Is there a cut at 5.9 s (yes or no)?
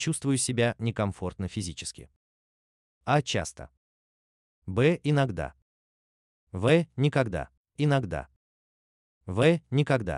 no